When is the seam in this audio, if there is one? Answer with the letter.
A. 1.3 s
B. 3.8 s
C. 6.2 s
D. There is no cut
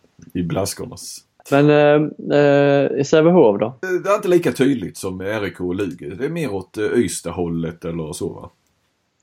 B